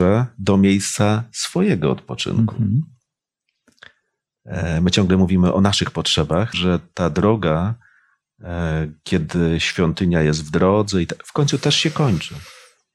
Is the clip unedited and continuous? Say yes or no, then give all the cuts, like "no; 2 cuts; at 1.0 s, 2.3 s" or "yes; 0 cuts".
no; 1 cut; at 6.5 s